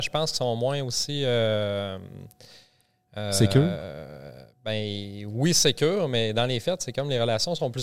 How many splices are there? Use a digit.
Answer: 0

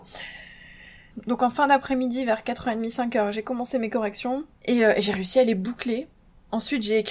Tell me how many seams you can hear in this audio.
1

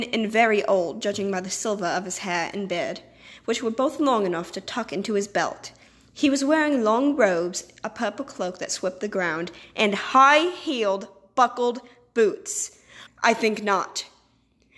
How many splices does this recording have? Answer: 1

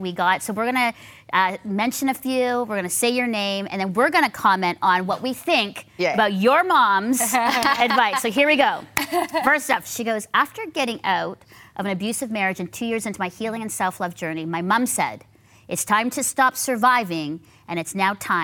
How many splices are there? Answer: 1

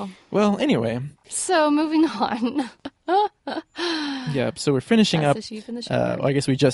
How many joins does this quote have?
0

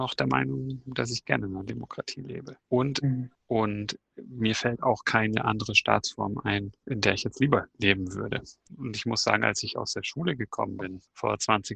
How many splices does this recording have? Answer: 2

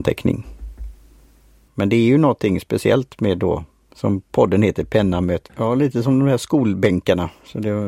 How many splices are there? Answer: 2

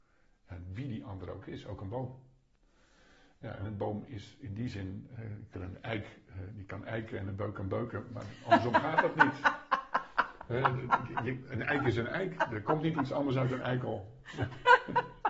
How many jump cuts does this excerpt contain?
1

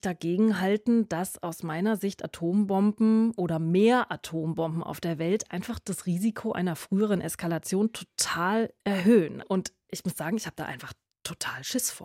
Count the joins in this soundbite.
1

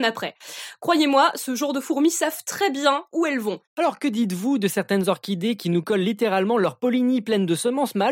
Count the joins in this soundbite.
1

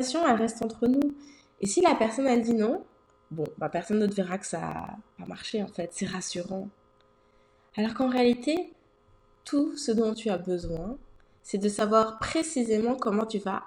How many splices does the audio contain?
0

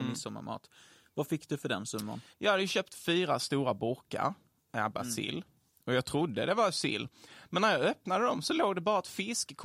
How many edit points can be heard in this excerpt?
1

